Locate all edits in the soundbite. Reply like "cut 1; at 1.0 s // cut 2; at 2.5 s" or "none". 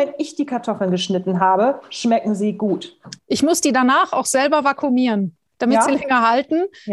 cut 1; at 3.2 s // cut 2; at 5.5 s